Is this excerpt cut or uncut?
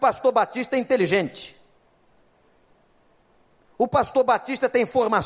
uncut